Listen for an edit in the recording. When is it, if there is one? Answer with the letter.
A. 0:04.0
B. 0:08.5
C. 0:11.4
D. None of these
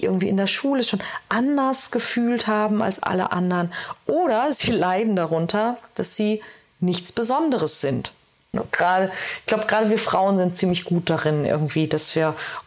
B